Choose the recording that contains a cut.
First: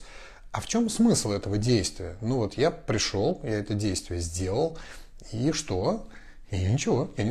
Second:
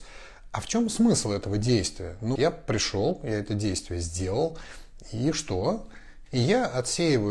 second; 2 cuts; at 2.4 s, 6.3 s

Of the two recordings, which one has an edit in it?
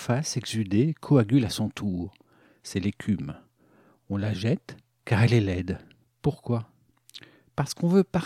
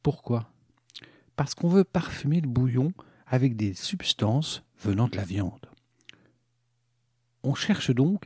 first; 1 cut; at 6.0 s

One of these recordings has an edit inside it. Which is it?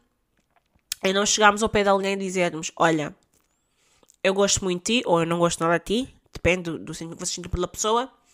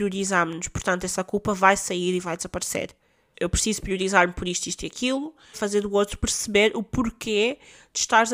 second; 2 cuts; at 3.3 s, 5.5 s

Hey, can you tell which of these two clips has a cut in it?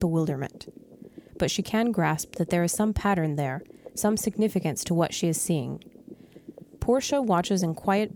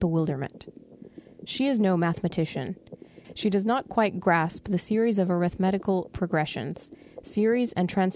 first; 2 cuts; at 1.3 s, 6.8 s

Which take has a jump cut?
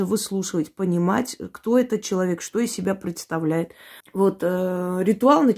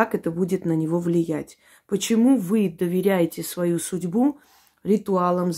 first; 1 cut; at 4.0 s

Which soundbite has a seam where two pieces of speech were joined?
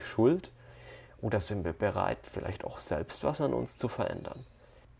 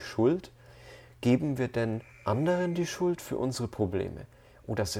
first; 1 cut; at 1.1 s

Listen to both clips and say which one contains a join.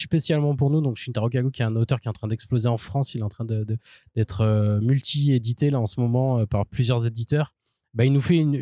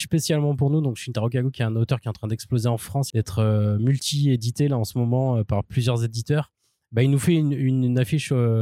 second; 1 cut; at 3.1 s

